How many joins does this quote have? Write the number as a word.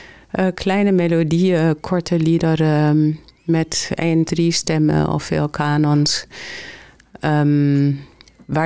one